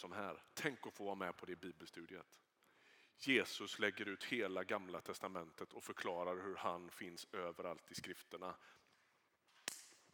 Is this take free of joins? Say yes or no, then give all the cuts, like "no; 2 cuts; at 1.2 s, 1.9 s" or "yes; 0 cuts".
yes; 0 cuts